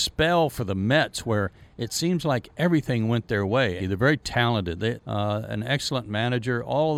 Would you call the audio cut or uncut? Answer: cut